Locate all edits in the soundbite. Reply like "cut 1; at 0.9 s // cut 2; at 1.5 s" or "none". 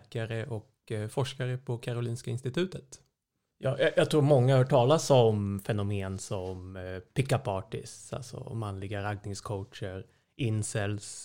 cut 1; at 3.5 s